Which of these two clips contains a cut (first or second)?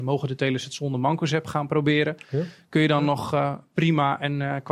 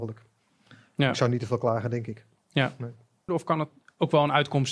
second